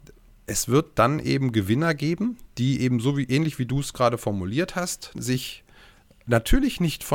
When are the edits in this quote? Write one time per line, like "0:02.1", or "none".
0:05.1